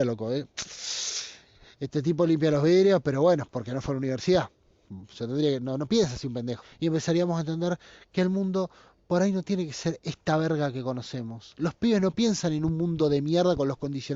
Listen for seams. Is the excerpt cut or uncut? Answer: cut